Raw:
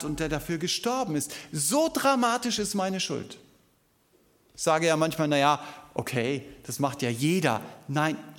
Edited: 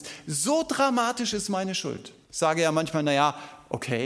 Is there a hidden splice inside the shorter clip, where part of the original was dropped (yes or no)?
yes